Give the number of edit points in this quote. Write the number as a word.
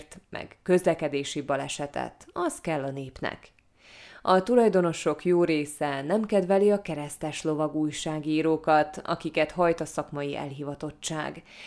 one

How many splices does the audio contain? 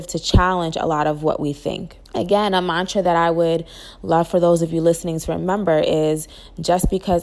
one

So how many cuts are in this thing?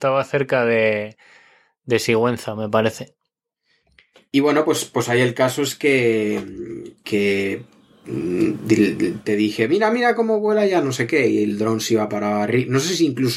zero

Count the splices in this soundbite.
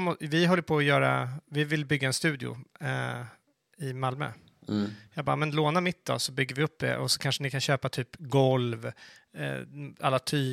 zero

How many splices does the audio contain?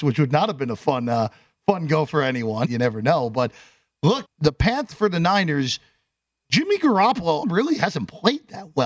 three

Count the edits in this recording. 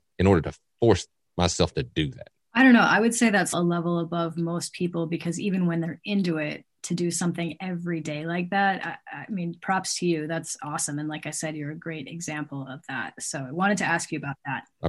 one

